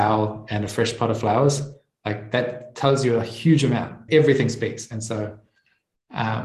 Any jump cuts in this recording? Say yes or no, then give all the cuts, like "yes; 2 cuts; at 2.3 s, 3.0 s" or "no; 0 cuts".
yes; 1 cut; at 4.1 s